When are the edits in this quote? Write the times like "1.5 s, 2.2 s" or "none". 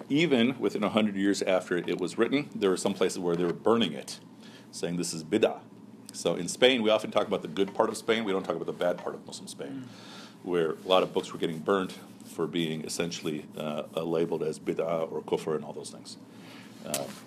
none